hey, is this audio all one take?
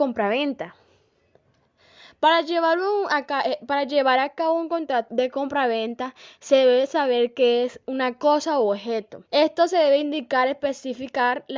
no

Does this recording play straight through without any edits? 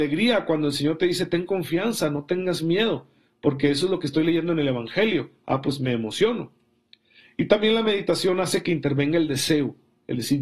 yes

